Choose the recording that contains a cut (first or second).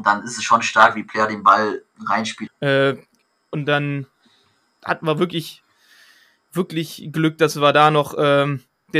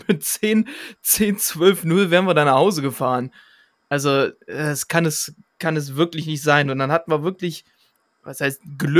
first